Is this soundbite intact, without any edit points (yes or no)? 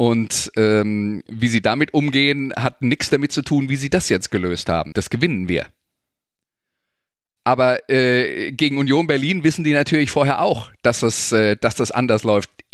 no